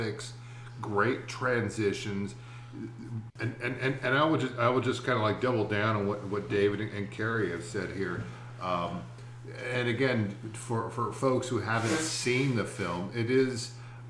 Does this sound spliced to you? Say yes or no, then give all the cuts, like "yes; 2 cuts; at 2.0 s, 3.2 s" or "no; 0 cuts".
yes; 1 cut; at 3.3 s